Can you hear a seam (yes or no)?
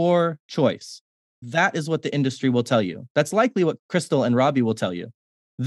no